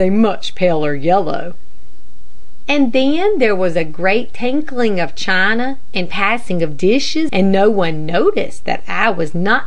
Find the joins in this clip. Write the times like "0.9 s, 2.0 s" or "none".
7.3 s